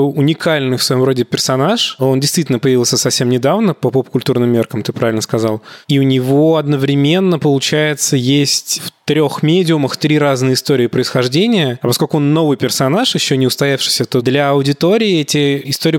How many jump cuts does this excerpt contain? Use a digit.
0